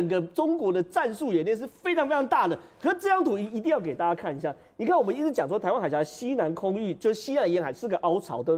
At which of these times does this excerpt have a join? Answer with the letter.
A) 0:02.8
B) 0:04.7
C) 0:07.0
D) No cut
D